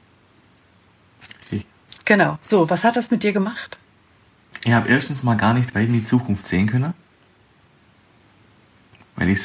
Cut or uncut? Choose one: uncut